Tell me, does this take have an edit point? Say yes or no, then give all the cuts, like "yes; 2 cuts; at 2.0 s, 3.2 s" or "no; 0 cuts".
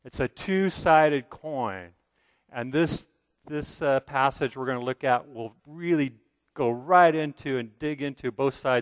yes; 1 cut; at 3.4 s